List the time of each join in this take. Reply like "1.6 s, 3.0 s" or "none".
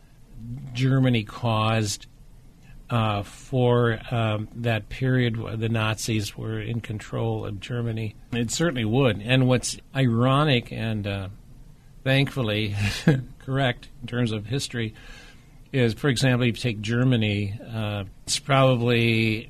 8.3 s, 18.1 s